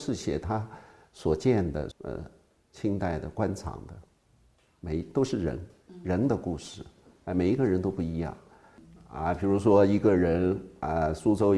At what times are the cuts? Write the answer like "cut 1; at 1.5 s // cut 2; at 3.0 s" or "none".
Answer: cut 1; at 1.9 s